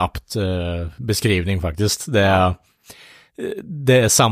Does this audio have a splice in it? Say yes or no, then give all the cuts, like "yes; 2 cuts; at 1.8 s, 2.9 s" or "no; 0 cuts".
no; 0 cuts